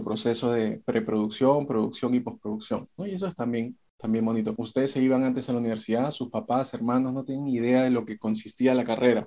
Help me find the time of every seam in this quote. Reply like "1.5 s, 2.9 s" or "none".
3.0 s, 4.5 s